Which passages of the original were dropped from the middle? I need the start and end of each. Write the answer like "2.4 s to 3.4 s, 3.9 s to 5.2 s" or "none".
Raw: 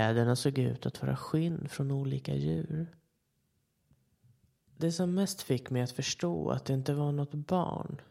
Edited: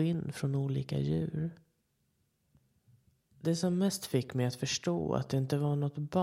none